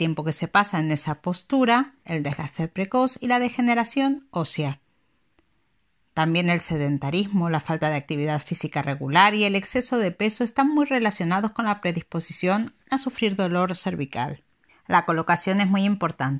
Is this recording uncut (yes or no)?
no